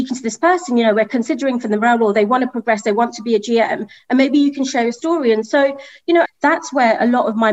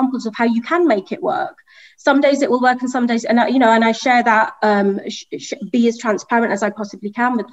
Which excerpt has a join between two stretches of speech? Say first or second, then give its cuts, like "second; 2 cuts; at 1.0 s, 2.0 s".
first; 1 cut; at 6.3 s